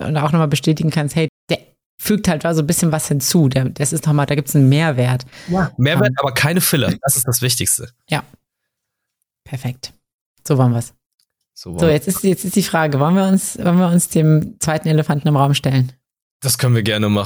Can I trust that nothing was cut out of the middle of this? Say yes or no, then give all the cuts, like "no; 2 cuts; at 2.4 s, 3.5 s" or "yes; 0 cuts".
no; 1 cut; at 1.3 s